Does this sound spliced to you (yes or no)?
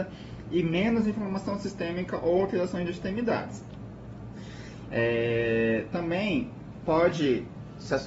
no